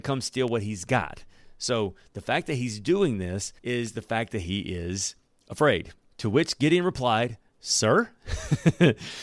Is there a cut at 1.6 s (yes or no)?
no